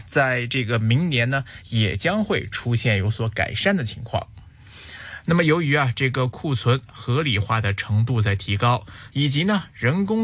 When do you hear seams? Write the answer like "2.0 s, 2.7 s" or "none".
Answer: 5.3 s, 9.1 s